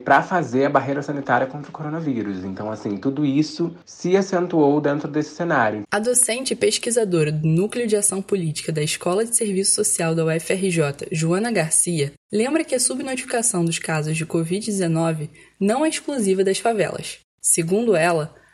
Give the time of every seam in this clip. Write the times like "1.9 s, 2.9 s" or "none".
none